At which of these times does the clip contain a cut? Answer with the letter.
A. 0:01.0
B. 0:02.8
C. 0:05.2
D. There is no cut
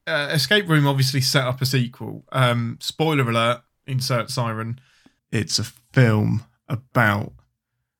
C